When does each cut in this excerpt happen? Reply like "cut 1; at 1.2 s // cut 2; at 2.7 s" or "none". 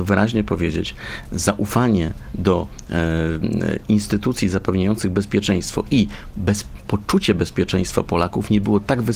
none